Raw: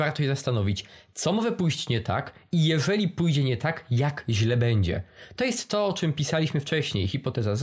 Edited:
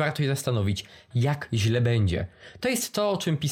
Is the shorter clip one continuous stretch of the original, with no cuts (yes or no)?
no